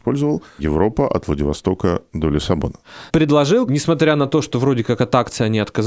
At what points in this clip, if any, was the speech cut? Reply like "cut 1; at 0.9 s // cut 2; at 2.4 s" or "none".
cut 1; at 3.1 s